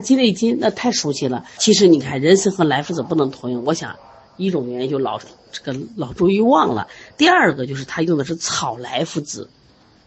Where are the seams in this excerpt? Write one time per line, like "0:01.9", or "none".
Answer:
0:01.6